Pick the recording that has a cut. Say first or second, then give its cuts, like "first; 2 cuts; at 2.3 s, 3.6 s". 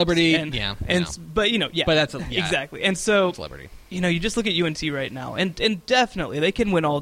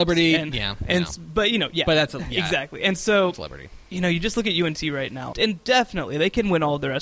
second; 1 cut; at 5.3 s